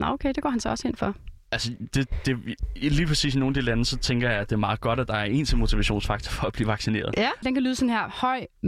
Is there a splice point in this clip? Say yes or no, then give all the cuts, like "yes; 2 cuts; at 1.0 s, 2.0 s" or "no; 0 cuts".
yes; 1 cut; at 7.4 s